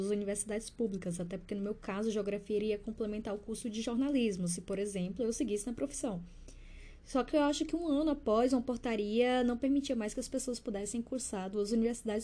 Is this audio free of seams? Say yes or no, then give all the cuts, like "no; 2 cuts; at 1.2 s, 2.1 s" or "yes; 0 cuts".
yes; 0 cuts